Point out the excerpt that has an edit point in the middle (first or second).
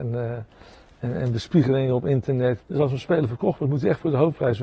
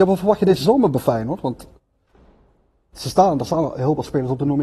first